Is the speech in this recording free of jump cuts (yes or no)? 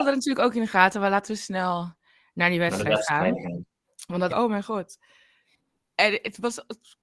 no